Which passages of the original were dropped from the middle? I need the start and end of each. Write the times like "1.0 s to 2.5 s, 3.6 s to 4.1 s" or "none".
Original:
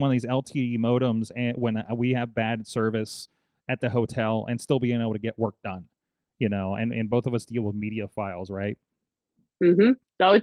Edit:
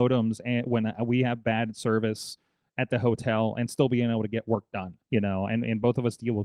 5.9 s to 6.3 s

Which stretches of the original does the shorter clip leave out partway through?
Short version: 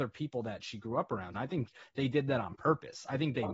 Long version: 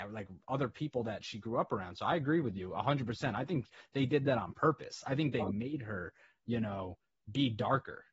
1.9 s to 3.3 s

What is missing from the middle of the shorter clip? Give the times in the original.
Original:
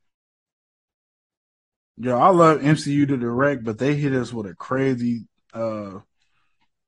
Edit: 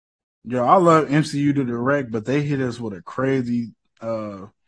none

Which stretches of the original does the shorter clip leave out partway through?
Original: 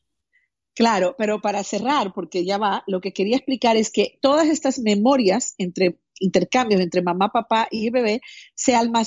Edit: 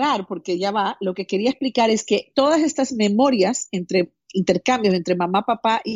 none

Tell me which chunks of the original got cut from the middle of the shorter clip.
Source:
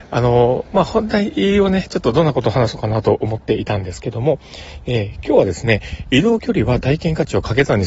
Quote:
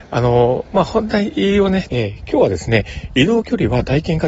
1.9 s to 4.8 s

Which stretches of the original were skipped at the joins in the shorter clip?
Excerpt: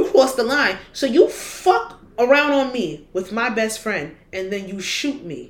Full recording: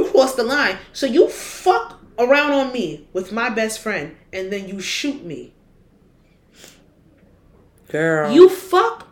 none

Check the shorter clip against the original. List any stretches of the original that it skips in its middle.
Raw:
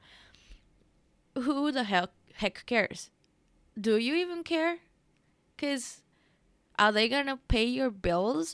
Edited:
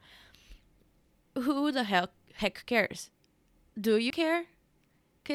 4.1 s to 4.4 s

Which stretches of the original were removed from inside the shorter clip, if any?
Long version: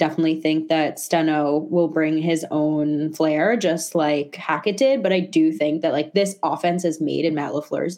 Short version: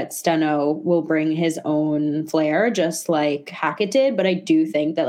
none

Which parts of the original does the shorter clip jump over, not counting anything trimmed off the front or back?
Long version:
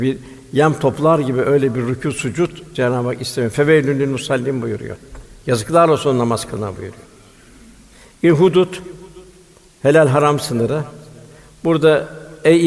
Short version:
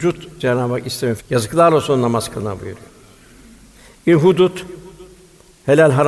3.5 s to 5.3 s

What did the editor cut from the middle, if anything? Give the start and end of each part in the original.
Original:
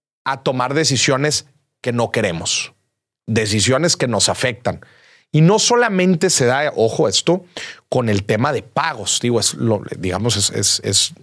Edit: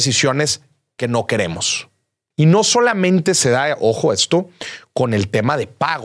3.1 s to 5.3 s

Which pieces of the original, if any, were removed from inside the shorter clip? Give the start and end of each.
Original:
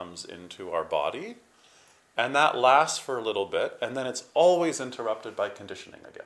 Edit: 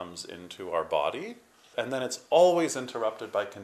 1.7 s to 3.8 s

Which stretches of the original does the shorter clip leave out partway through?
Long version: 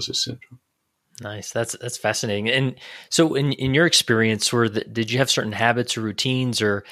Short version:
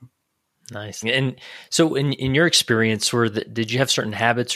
1.5 s to 2.4 s

